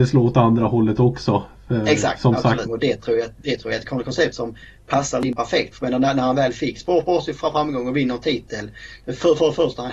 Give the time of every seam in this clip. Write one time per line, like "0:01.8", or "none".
0:02.6
0:05.7

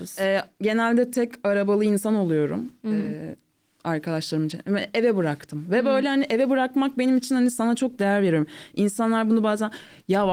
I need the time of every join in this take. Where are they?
none

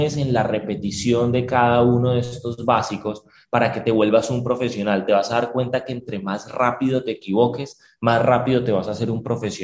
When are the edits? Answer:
none

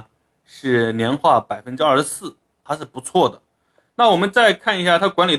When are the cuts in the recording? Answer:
none

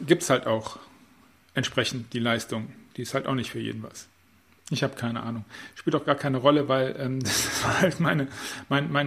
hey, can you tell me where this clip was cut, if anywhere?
0:04.6

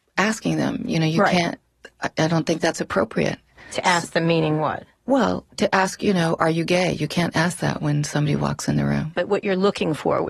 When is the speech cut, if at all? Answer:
0:09.1

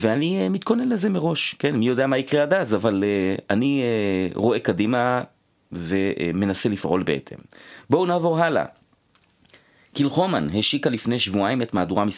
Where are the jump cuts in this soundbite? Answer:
none

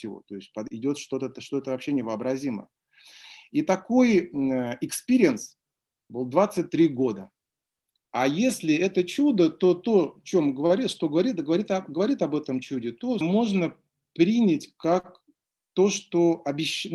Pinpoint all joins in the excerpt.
0:08.0
0:13.2

